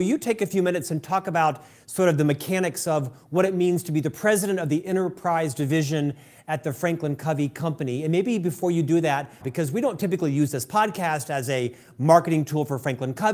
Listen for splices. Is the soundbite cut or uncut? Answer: cut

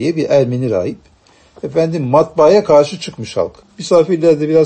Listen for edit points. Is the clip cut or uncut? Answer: cut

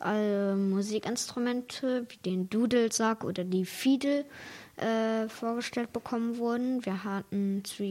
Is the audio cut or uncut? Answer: uncut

